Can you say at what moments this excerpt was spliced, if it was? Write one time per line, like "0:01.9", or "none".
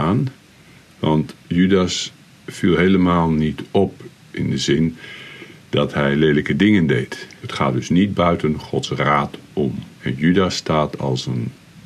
0:07.4
0:09.9